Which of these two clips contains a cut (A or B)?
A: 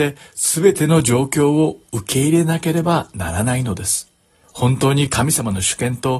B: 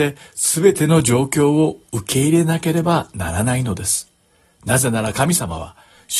A